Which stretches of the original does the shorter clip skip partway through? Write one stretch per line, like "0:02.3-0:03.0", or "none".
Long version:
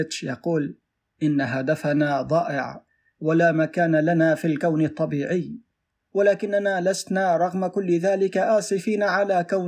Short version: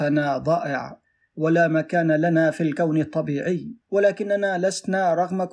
0:05.7-0:06.0